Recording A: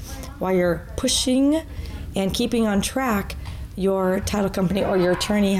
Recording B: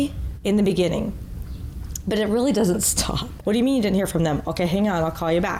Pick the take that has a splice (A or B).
B